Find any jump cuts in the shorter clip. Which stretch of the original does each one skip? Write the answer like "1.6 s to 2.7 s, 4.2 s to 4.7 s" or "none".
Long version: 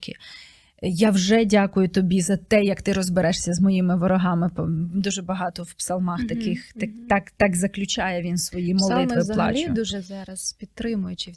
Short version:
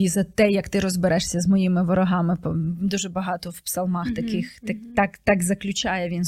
none